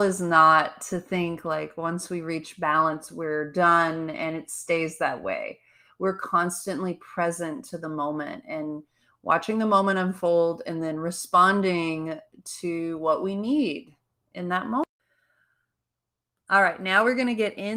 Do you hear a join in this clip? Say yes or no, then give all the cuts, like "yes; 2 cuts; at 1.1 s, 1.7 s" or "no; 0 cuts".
no; 0 cuts